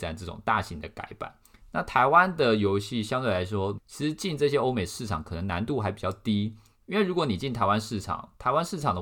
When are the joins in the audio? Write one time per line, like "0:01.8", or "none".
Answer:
0:01.6
0:03.8